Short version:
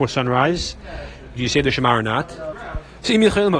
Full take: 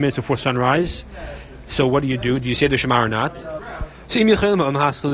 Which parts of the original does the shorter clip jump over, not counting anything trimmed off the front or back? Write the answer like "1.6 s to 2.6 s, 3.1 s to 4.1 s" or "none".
1.6 s to 2.4 s